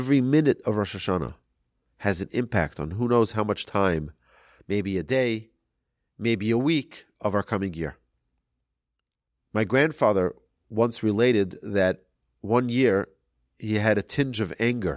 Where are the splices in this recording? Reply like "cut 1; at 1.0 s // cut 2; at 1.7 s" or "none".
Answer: none